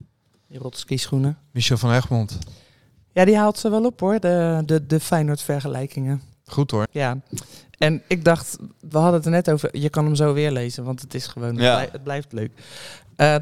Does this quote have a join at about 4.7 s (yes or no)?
yes